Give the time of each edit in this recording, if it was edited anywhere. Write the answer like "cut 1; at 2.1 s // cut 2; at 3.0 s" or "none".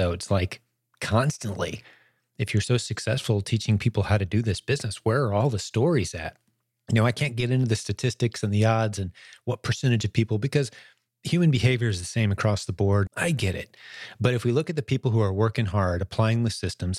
cut 1; at 13.1 s